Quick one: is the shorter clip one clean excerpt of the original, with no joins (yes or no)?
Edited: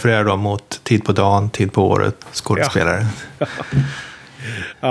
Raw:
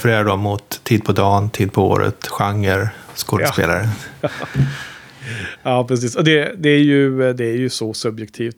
no